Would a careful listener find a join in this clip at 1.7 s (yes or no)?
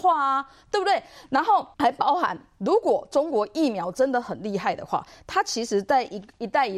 yes